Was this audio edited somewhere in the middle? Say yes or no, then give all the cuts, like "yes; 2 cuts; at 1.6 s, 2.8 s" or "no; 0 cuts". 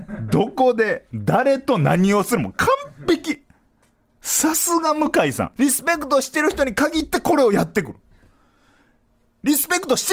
yes; 1 cut; at 5.6 s